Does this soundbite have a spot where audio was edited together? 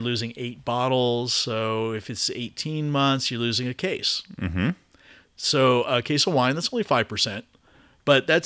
no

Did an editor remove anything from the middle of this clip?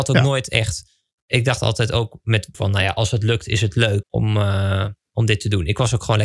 yes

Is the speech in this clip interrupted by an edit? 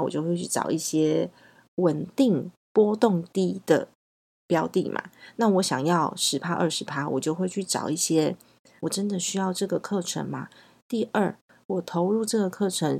yes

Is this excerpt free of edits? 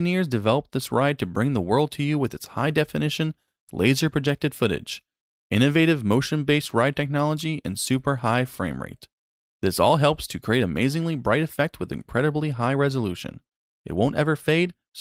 yes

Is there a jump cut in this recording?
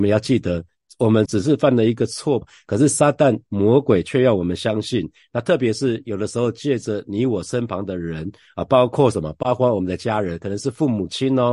yes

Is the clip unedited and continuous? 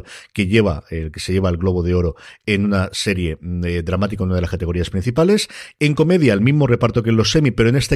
yes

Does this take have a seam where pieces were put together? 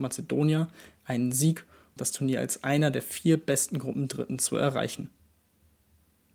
yes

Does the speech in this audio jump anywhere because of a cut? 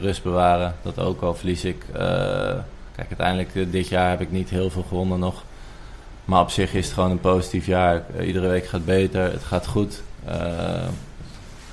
no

